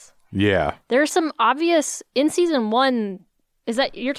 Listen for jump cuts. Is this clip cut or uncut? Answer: uncut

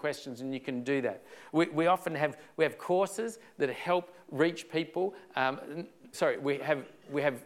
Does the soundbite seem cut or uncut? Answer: cut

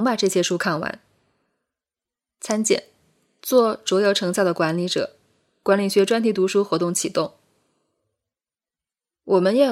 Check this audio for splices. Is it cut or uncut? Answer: uncut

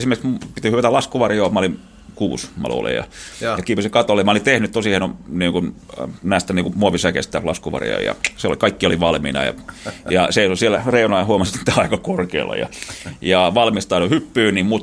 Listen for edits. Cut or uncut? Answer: uncut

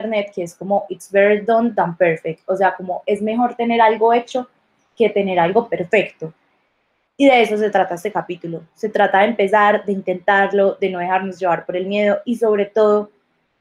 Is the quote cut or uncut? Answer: uncut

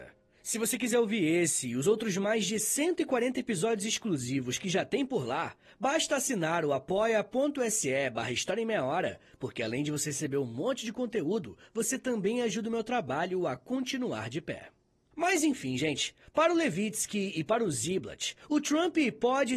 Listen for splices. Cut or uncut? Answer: uncut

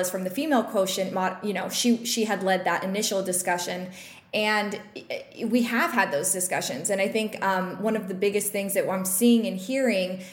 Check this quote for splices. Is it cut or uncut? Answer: uncut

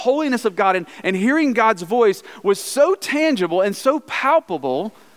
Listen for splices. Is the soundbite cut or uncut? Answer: uncut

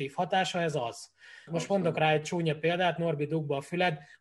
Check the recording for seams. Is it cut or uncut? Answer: cut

